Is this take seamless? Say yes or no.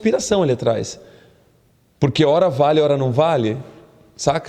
yes